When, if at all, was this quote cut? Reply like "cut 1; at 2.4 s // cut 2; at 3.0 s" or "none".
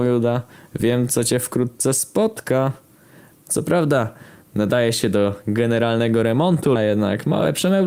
cut 1; at 6.8 s